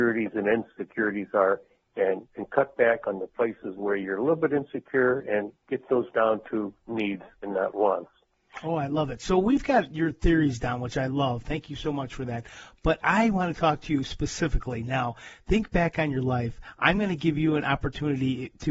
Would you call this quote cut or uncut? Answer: uncut